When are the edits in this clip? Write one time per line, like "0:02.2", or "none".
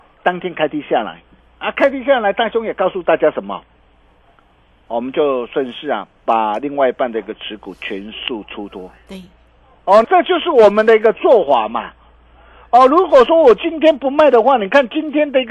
0:04.9
0:10.0